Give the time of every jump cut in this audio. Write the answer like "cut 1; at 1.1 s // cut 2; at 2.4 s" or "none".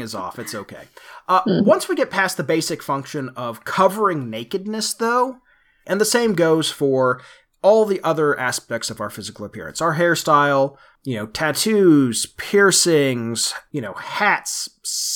cut 1; at 5.8 s